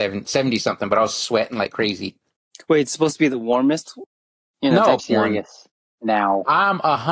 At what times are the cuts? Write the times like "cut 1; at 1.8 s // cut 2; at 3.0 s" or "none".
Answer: cut 1; at 5.0 s